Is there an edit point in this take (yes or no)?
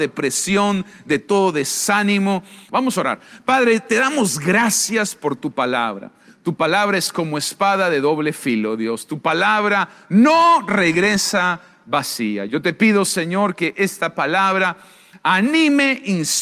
yes